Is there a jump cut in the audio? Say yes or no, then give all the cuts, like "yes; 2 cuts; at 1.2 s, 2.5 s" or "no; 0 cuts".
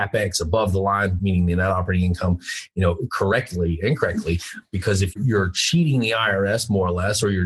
yes; 1 cut; at 1.2 s